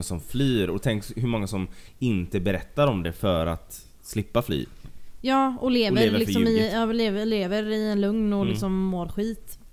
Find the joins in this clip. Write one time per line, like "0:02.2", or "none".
none